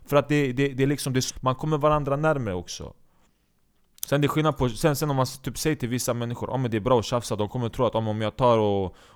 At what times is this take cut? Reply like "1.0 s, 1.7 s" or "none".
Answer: 1.3 s